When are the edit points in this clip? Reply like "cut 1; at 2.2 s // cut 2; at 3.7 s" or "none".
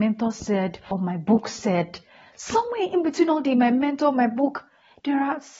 none